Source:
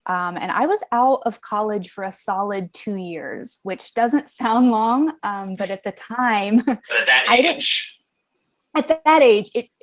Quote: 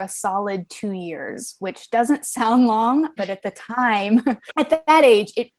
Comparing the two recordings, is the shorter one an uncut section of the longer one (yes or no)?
no